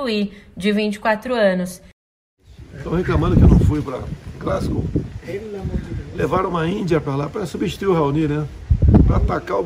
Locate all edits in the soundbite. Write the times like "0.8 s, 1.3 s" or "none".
none